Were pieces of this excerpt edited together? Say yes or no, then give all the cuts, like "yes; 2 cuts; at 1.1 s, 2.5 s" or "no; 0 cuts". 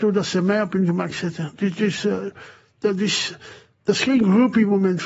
no; 0 cuts